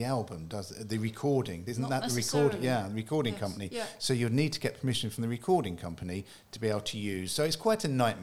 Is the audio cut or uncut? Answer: uncut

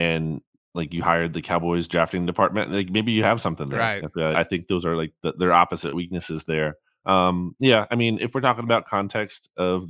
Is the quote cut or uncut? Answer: cut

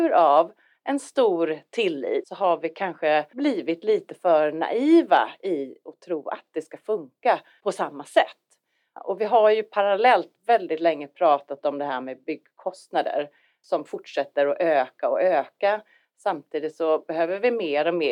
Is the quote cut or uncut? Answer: uncut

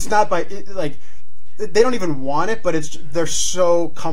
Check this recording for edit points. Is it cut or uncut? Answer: uncut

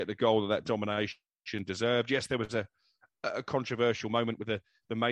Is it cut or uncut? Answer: uncut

